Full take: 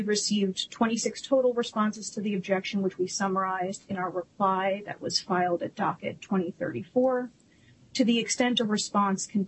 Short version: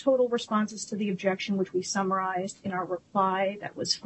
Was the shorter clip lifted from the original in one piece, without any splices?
yes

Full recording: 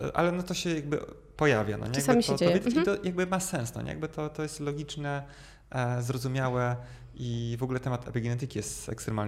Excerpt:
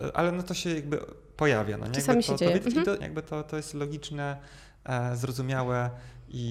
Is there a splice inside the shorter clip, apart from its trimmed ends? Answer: yes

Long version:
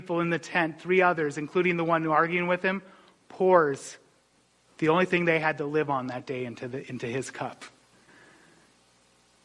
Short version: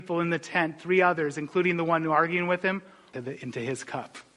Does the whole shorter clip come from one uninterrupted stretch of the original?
no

